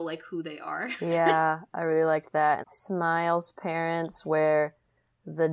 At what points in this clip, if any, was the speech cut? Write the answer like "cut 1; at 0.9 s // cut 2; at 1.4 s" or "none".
cut 1; at 2.6 s